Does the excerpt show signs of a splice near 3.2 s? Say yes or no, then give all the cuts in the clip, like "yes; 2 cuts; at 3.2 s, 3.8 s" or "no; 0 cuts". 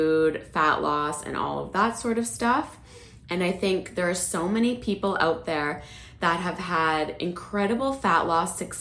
yes; 1 cut; at 3.2 s